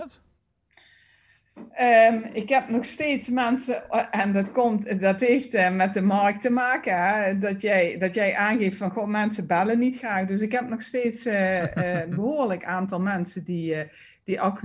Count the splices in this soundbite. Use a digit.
0